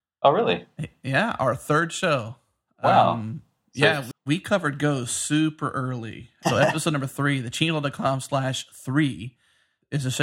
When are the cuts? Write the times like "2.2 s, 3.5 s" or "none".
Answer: 4.1 s, 6.4 s